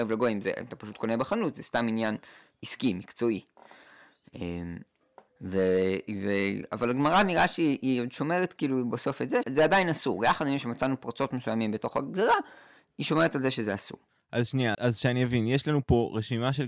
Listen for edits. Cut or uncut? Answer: cut